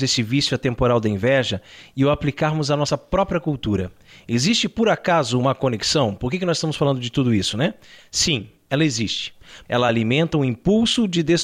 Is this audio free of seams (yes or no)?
no